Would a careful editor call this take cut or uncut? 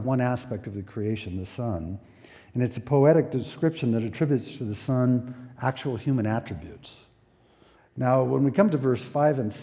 cut